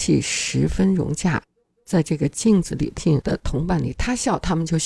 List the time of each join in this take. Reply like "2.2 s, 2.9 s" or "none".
3.0 s